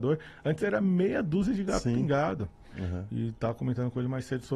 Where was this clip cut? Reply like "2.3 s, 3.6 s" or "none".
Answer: 2.7 s